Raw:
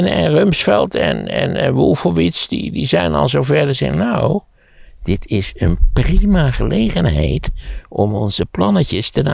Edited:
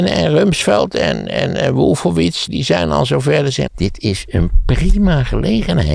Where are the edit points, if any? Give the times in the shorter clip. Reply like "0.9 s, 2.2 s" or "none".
2.5 s, 3.7 s